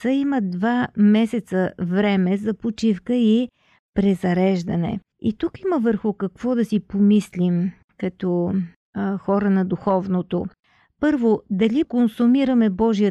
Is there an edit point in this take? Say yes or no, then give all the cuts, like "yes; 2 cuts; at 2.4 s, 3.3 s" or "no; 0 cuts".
yes; 1 cut; at 11.8 s